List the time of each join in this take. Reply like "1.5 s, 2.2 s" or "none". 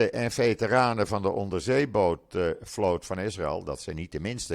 none